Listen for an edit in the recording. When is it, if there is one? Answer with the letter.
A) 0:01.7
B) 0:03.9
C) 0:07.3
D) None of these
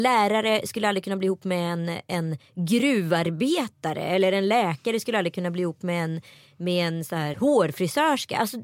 C